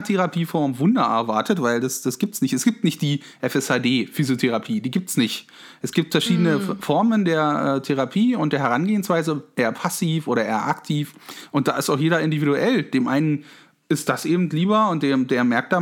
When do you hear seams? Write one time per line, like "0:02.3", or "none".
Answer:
none

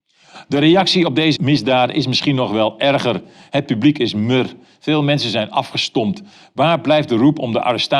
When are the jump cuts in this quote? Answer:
0:01.3

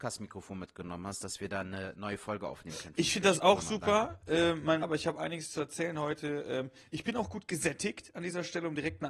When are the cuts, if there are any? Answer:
0:04.8

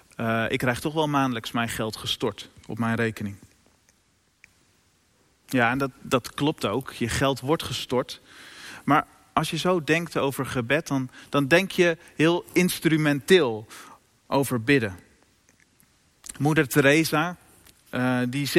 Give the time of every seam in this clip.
none

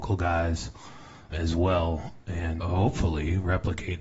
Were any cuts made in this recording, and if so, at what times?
0:01.3
0:02.6

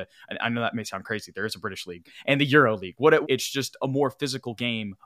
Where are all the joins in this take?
0:03.2

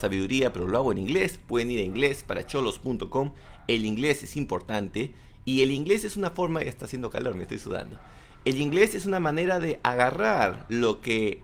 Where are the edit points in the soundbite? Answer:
none

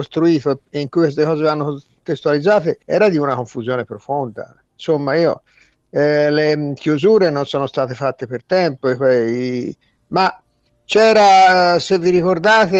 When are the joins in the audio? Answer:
0:02.8

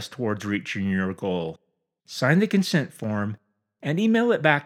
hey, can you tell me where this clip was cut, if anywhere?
0:02.0

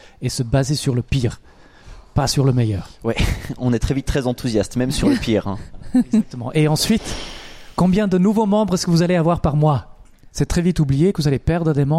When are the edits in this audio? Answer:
none

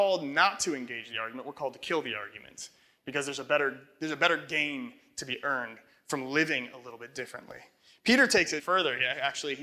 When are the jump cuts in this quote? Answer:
0:08.6

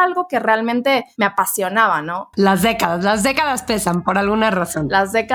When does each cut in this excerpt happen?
0:02.3

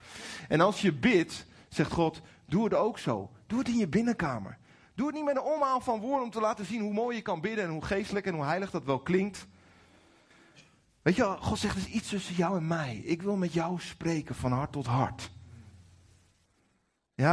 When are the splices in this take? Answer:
none

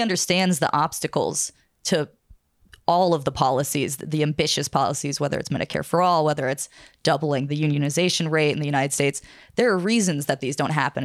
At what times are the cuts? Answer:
none

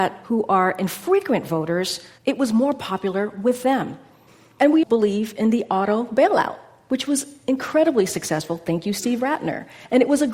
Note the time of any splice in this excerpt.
0:04.8

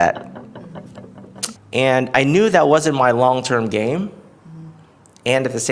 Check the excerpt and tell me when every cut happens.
0:01.6

